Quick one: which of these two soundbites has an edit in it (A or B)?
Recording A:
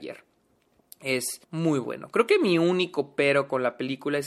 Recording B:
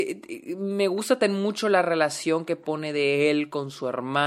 A